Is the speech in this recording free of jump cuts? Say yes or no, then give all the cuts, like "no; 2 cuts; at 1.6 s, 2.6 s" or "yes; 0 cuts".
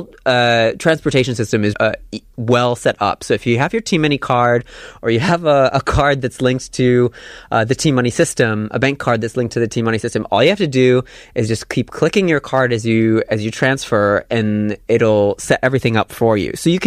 no; 1 cut; at 1.7 s